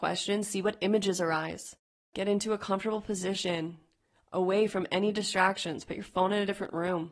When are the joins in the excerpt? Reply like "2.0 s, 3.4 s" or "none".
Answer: none